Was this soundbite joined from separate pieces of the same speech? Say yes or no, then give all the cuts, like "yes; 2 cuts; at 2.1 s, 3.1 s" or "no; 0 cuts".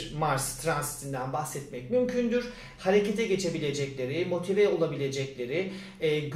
yes; 1 cut; at 2.8 s